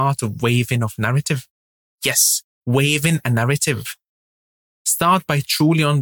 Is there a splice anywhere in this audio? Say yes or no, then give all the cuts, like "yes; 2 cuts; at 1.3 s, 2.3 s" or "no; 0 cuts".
no; 0 cuts